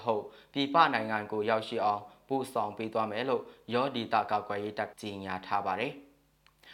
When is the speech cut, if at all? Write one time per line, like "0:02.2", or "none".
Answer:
0:04.9